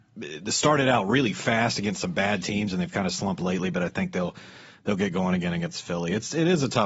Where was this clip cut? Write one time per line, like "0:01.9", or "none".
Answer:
none